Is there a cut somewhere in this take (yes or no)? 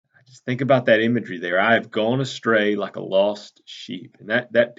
no